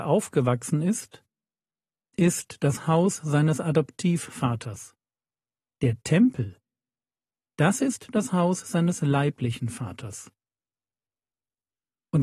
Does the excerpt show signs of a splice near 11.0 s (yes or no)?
no